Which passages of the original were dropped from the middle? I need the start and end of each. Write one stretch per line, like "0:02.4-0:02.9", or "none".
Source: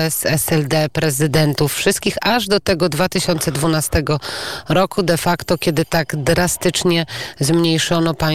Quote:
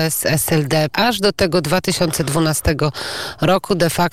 0:00.9-0:02.2